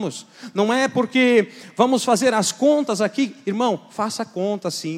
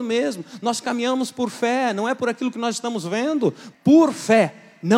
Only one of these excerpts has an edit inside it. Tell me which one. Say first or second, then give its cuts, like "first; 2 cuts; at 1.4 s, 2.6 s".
second; 1 cut; at 3.7 s